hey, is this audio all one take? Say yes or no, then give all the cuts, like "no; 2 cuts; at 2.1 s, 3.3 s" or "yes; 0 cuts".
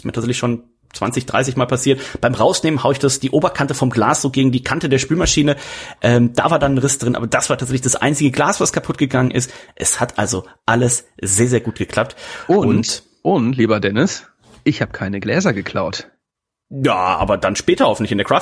yes; 0 cuts